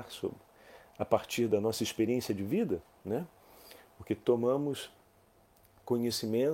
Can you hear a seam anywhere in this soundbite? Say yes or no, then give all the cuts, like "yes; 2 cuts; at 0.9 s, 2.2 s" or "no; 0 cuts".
no; 0 cuts